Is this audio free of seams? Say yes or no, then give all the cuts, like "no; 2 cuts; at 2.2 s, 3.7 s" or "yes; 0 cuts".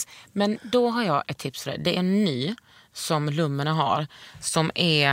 yes; 0 cuts